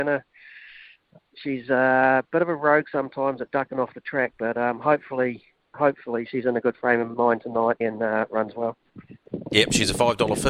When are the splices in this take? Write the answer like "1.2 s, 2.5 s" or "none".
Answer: 7.8 s